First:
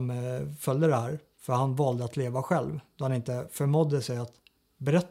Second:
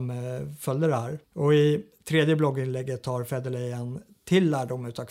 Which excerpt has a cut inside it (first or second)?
second